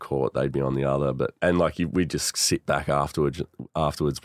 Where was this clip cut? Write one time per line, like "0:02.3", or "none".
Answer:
0:01.4